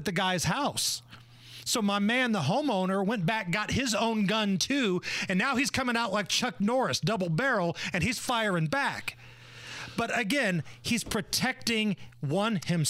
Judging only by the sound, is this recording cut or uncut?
uncut